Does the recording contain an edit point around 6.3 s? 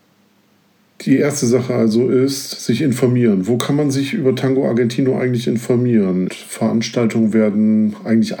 yes; 1 cut; at 6.3 s

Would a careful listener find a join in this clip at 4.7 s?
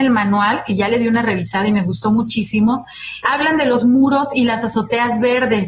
no; 1 cut; at 3.2 s

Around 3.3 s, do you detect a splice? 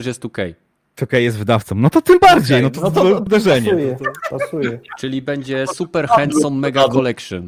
yes; 1 cut; at 3.3 s

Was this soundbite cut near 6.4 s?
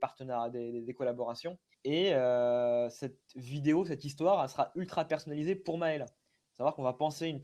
no; 2 cuts; at 1.7 s, 3.3 s

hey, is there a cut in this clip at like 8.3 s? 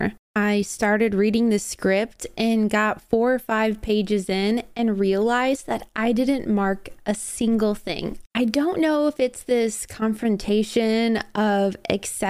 yes; 1 cut; at 8.3 s

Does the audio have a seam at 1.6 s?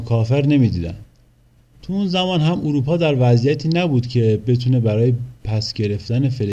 no; 0 cuts

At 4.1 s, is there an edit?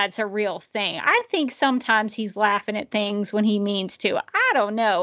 no; 0 cuts

